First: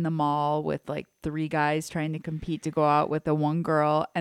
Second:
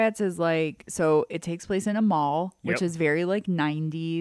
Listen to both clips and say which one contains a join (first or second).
first